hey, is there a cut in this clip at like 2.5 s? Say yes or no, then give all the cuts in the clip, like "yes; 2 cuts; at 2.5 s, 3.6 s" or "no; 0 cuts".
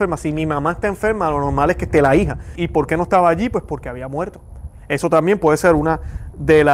yes; 1 cut; at 2.5 s